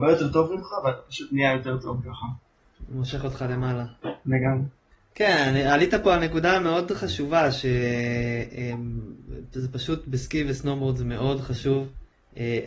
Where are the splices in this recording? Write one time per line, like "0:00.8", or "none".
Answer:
none